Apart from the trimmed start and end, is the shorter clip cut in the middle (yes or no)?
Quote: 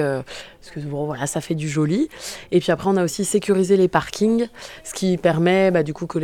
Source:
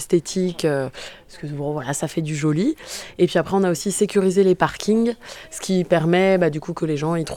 no